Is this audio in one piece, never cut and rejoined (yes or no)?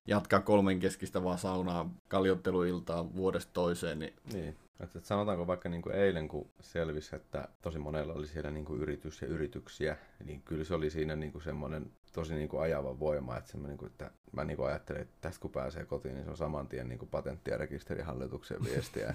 yes